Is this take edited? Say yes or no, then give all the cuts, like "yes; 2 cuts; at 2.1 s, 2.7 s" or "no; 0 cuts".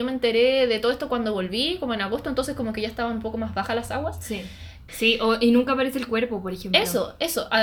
yes; 1 cut; at 4.9 s